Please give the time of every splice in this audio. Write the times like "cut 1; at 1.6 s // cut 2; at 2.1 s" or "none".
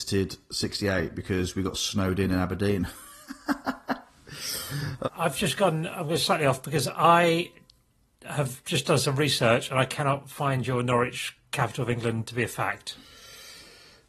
cut 1; at 5.0 s